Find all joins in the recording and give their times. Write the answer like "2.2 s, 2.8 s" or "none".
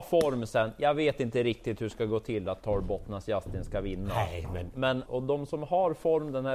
5.1 s